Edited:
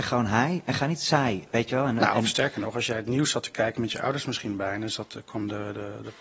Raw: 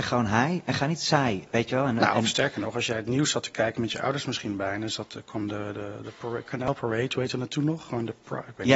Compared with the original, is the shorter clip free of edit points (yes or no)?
yes